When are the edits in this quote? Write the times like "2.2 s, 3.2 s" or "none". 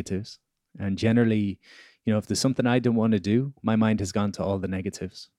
none